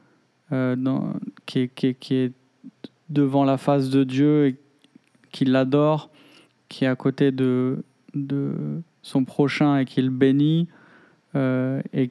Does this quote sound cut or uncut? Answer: uncut